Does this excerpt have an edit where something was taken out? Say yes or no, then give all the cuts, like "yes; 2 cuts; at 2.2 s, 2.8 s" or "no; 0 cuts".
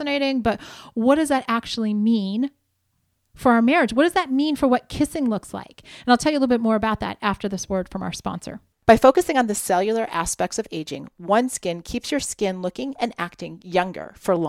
yes; 1 cut; at 8.7 s